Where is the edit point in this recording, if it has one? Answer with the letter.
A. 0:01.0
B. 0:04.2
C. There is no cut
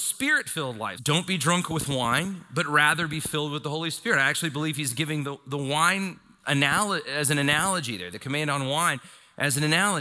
A